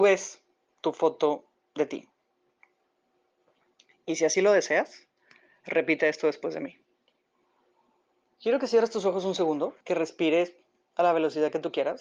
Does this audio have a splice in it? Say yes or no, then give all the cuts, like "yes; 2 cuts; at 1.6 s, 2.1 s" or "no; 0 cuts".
yes; 2 cuts; at 8.3 s, 9.8 s